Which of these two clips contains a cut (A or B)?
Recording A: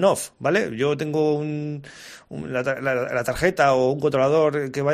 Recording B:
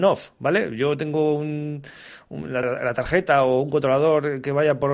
B